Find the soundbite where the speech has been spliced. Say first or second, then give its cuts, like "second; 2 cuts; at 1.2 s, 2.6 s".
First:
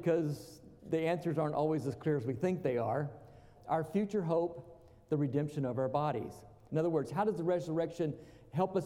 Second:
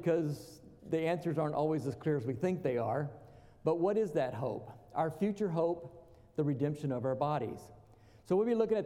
first; 2 cuts; at 3.6 s, 6.7 s